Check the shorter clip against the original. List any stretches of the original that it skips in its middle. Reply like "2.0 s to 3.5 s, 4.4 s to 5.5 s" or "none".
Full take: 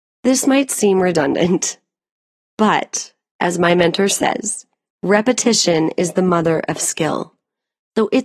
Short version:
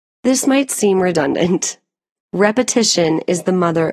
2.2 s to 4.9 s